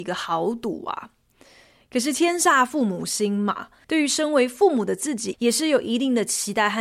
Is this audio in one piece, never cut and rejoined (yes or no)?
no